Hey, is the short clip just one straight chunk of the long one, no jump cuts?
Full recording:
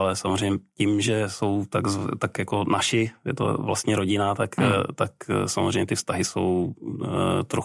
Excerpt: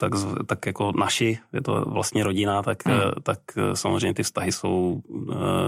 yes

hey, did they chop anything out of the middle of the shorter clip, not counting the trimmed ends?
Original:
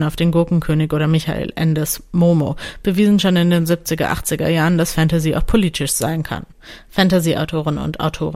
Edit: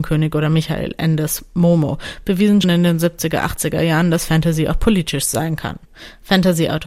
yes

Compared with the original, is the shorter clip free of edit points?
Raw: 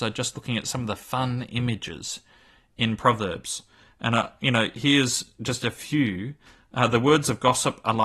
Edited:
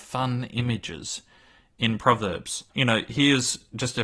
no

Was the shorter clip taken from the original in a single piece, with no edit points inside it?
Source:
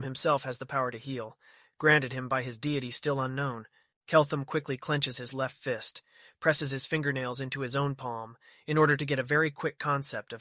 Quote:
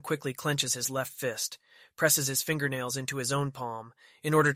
yes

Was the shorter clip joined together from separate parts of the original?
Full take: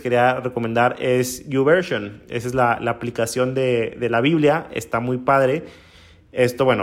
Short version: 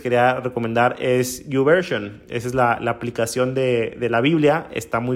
no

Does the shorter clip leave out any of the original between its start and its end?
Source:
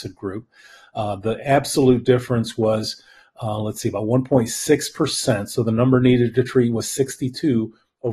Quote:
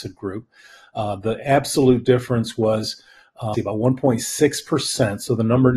yes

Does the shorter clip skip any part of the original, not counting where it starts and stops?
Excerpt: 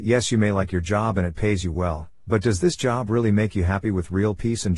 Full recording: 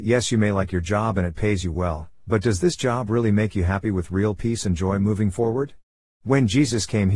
no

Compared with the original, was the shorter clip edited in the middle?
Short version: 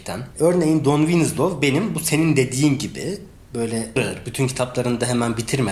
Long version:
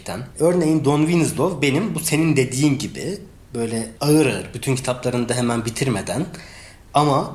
yes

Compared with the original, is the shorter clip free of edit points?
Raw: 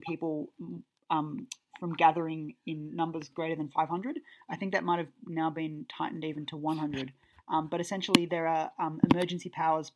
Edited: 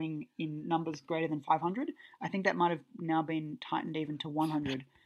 yes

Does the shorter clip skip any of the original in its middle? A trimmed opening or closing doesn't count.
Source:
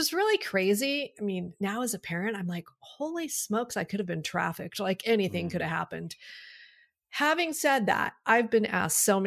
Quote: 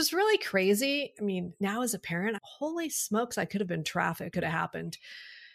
yes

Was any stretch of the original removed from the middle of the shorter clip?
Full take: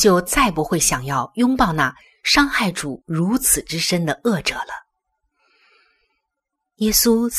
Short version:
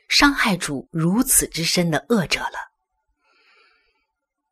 no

